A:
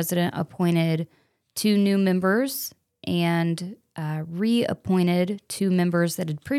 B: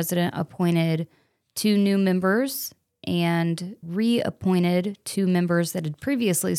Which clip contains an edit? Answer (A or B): B